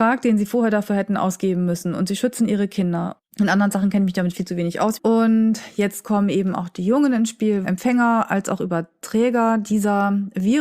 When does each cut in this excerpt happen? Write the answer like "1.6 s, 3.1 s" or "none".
3.2 s, 5.0 s, 7.6 s